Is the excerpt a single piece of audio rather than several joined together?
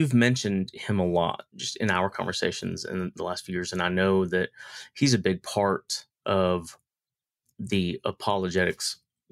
yes; 0 cuts

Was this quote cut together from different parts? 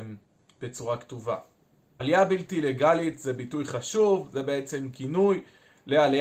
no; 0 cuts

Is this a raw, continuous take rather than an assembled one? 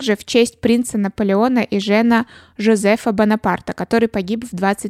yes; 0 cuts

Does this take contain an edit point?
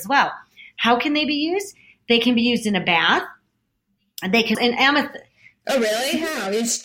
yes; 1 cut; at 4.5 s

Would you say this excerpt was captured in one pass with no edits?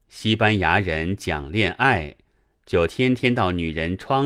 yes; 0 cuts

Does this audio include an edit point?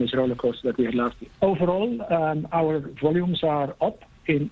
yes; 1 cut; at 1.4 s

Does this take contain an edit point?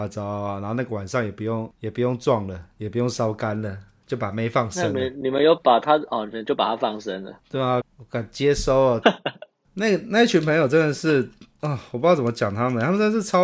yes; 2 cuts; at 7.8 s, 9.0 s

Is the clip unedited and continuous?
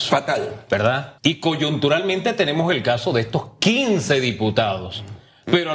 no; 1 cut; at 1.2 s

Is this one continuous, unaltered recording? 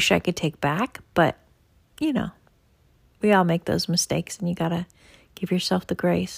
yes; 0 cuts

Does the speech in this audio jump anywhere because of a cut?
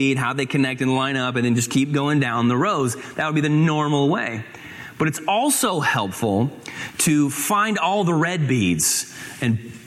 no; 0 cuts

